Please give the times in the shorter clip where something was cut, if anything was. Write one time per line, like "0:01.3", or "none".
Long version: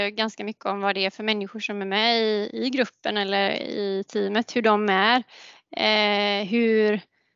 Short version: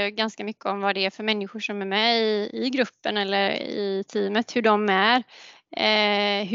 none